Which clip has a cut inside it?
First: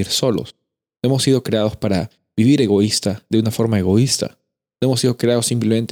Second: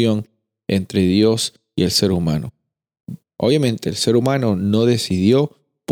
second; 1 cut; at 3.2 s

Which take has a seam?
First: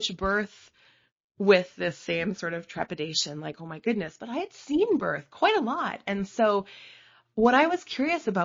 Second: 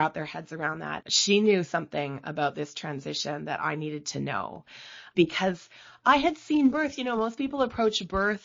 second; 1 cut; at 1.0 s

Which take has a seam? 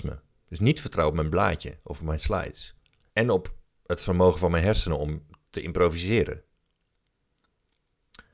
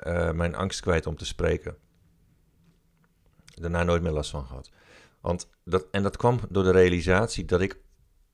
first; 1 cut; at 3.1 s

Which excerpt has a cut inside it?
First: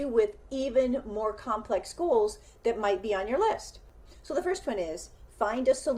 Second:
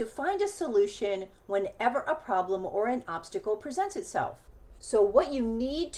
second; 1 cut; at 4.8 s

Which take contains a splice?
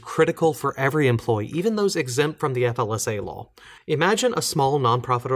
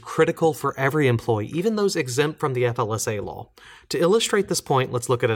first; 1 cut; at 3.8 s

